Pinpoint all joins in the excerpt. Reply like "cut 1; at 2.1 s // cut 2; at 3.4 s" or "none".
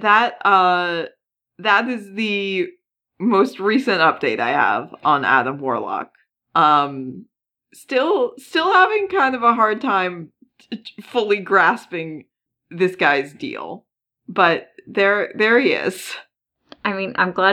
none